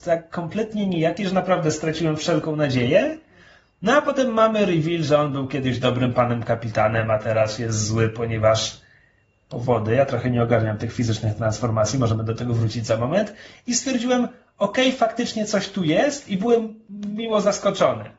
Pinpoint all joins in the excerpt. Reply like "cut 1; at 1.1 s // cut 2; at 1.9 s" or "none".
none